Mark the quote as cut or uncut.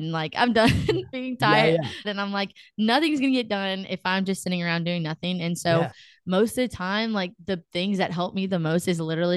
cut